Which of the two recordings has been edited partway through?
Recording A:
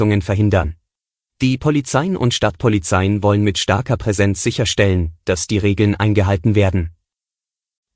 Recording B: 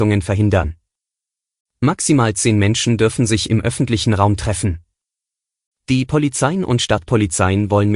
A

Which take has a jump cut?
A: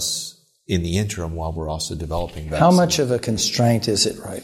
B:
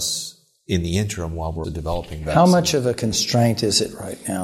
B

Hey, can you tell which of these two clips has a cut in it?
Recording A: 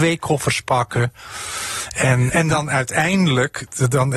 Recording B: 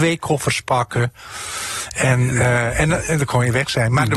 A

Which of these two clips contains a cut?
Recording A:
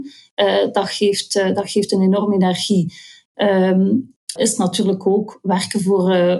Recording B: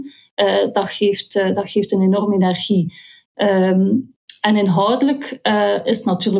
A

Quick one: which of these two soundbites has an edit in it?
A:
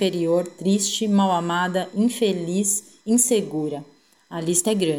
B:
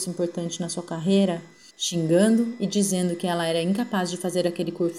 B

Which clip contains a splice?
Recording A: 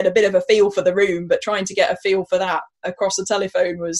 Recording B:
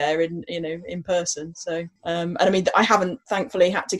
B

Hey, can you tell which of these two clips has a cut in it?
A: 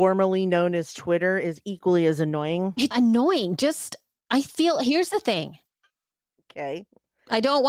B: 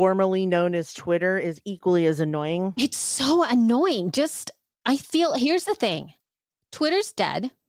A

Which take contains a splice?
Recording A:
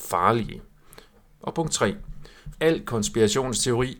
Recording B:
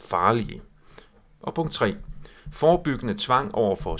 A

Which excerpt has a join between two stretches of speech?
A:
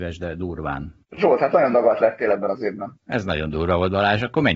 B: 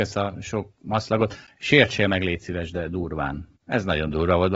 B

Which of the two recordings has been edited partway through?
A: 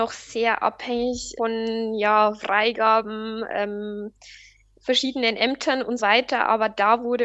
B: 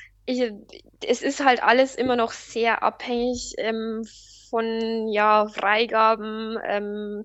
A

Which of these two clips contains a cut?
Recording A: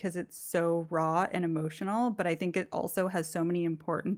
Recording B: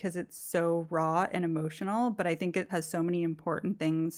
B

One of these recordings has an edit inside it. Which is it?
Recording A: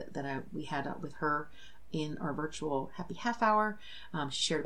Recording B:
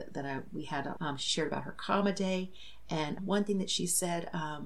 B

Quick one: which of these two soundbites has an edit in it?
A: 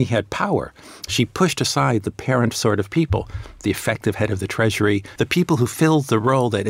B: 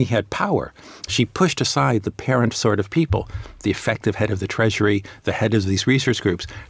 A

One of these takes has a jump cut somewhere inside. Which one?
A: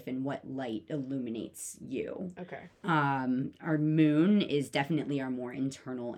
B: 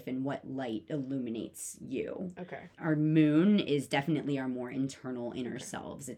B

